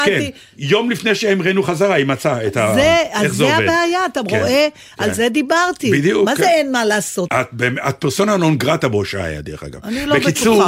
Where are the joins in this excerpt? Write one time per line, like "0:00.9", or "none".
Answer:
0:07.3